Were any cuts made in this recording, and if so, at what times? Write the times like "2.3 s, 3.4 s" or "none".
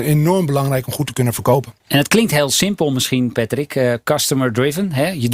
1.8 s

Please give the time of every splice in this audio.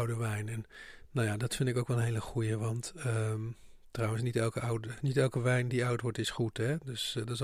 none

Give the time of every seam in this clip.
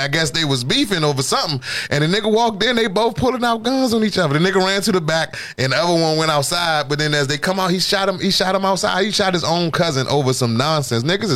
none

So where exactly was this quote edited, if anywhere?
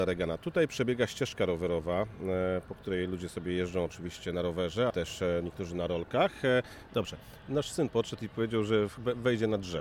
4.9 s, 6.9 s

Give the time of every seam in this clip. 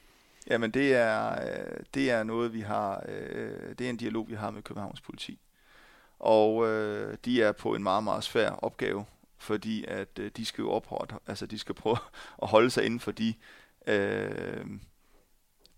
none

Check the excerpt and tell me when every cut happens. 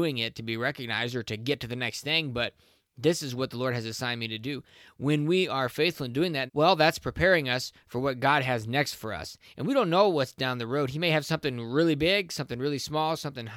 6.5 s

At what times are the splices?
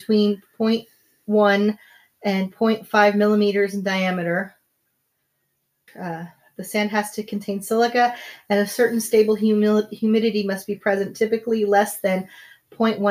5.9 s

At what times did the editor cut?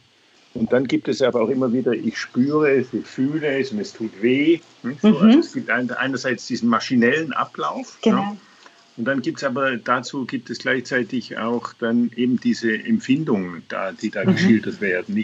none

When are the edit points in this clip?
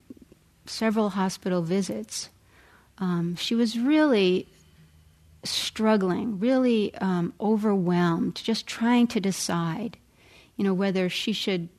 none

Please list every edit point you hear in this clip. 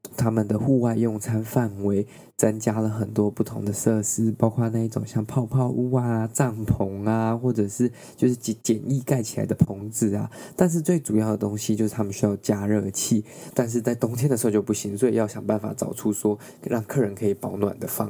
13.5 s

